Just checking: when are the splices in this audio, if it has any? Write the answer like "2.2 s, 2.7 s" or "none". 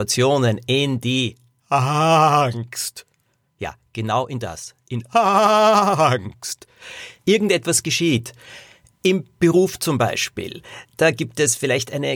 7.2 s